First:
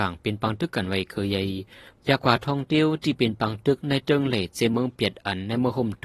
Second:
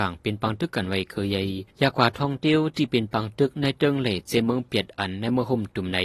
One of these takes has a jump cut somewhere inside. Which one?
second; 1 cut; at 1.7 s

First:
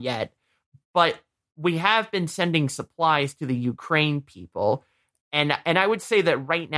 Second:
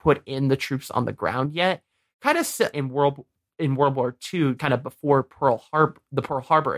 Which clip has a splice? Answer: second; 2 cuts; at 2.7 s, 4.6 s

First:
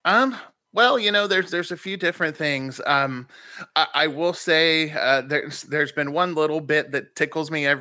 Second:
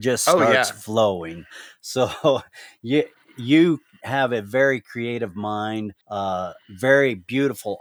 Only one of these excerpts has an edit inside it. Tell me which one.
second; 1 cut; at 6.0 s

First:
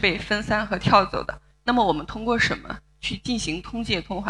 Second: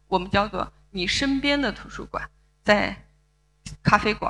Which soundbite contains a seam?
first; 1 cut; at 1.5 s

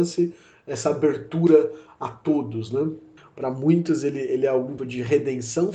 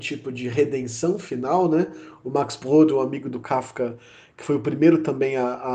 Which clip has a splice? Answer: first; 2 cuts; at 3.2 s, 4.8 s

